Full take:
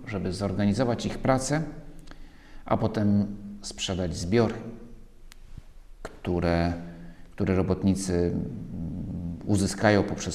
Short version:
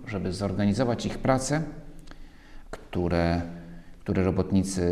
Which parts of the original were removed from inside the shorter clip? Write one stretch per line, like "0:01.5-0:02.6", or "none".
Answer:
0:02.6-0:06.0